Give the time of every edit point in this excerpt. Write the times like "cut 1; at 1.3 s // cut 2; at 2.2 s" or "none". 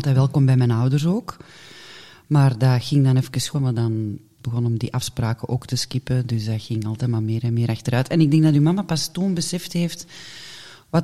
cut 1; at 3.5 s